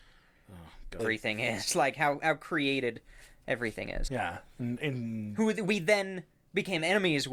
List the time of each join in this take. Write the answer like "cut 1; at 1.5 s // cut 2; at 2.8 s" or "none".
cut 1; at 1.0 s // cut 2; at 4.1 s